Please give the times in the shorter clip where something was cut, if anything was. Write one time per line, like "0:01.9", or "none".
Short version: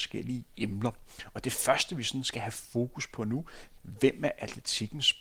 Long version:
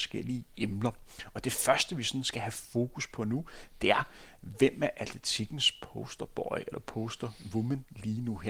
0:03.8